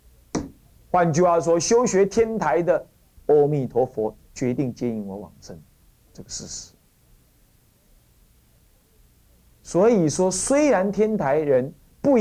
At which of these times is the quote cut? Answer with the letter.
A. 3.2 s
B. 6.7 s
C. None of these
A